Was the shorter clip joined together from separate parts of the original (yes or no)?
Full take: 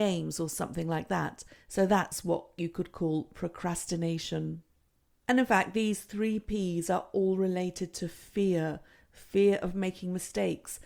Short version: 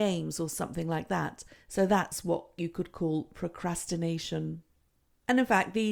no